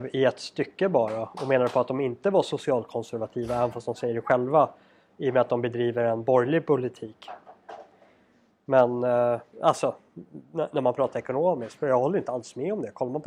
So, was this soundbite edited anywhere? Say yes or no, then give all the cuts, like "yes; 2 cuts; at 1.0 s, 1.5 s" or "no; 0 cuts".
no; 0 cuts